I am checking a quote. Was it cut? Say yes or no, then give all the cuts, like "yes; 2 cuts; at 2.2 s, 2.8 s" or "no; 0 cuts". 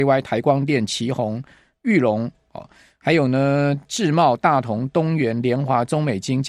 no; 0 cuts